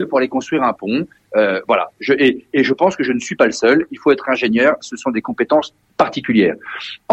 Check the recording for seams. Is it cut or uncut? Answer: uncut